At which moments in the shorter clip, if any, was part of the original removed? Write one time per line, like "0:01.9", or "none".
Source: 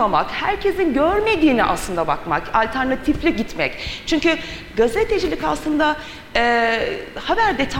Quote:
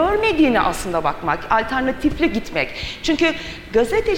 none